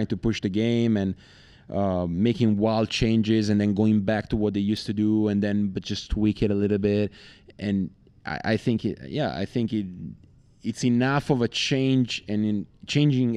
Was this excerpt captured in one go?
yes; 0 cuts

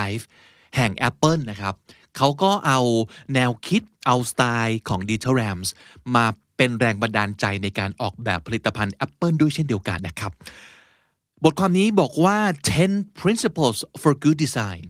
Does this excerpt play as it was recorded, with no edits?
no; 1 cut; at 10.0 s

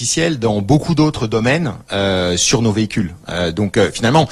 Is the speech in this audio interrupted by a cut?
no; 0 cuts

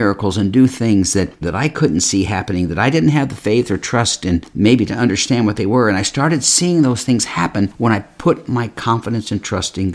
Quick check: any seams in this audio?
yes; 1 cut; at 1.4 s

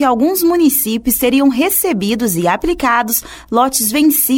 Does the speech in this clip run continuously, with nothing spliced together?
yes; 0 cuts

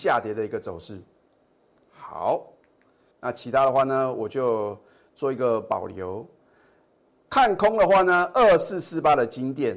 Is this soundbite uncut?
no; 1 cut; at 3.1 s

